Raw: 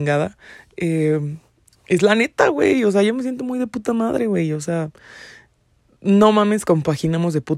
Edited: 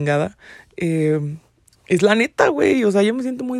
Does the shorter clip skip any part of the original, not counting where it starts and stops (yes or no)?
no